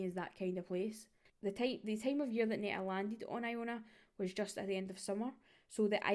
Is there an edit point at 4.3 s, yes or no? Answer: no